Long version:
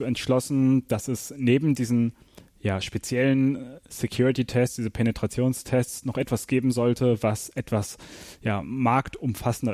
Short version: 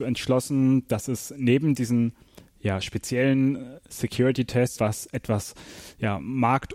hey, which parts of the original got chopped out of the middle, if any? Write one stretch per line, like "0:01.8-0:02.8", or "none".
0:04.8-0:07.2